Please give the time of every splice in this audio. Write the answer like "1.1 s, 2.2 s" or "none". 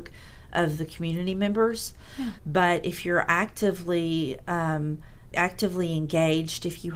2.4 s, 5.3 s